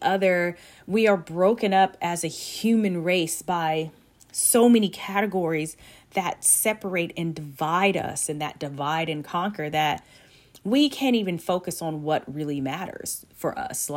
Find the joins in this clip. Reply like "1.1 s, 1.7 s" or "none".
none